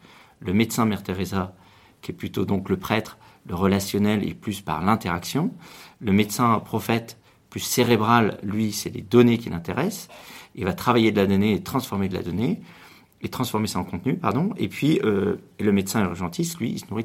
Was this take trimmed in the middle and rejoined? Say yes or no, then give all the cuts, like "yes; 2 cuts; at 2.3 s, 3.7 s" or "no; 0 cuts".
no; 0 cuts